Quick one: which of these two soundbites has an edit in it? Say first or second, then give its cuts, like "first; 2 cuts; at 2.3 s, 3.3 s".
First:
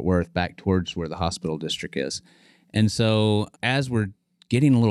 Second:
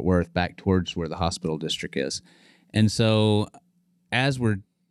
first; 1 cut; at 3.5 s